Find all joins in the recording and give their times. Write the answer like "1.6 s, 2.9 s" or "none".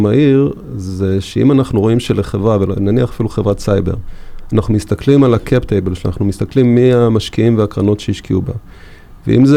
none